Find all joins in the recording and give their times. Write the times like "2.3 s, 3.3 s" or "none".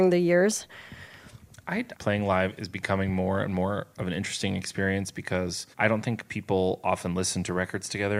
1.9 s, 5.7 s